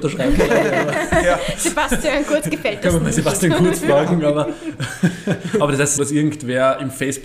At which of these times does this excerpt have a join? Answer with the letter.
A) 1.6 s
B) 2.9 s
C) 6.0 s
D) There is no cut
C